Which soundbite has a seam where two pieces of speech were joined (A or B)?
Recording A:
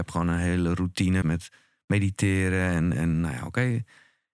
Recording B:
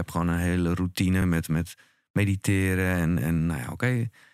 A